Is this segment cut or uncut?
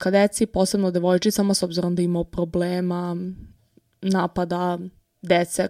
uncut